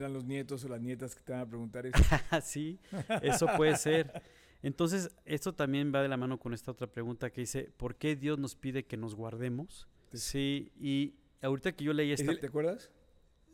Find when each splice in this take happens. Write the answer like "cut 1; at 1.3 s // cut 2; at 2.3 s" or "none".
cut 1; at 10.1 s // cut 2; at 12.4 s

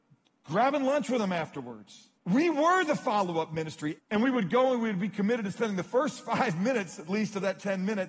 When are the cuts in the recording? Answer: cut 1; at 2.2 s // cut 2; at 4.0 s

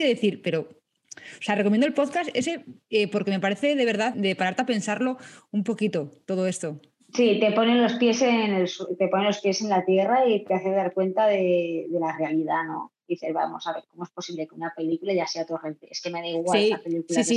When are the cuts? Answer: cut 1; at 4.1 s

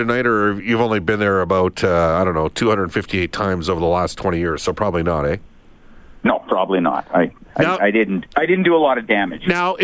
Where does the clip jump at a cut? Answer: none

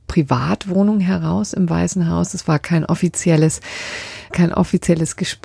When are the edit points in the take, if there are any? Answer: cut 1; at 4.3 s

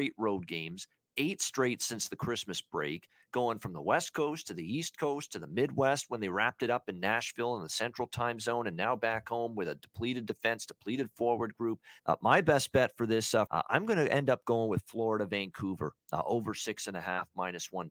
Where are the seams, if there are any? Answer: cut 1; at 12.0 s // cut 2; at 13.5 s

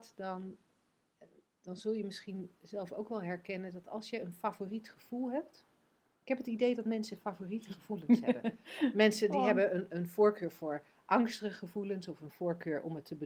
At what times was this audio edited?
none

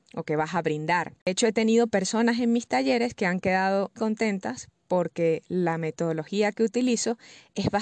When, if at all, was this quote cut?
cut 1; at 1.2 s // cut 2; at 4.0 s

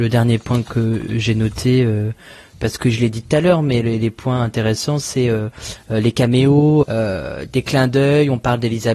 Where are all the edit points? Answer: cut 1; at 6.8 s

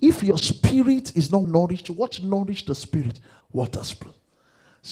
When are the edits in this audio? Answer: cut 1; at 1.4 s // cut 2; at 3.4 s

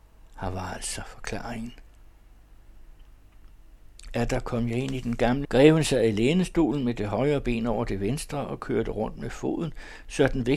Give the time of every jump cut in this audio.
cut 1; at 5.4 s

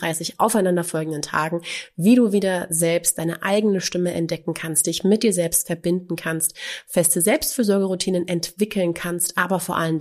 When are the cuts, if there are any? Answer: none

